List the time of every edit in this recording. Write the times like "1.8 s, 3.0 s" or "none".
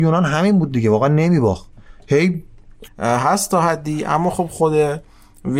2.9 s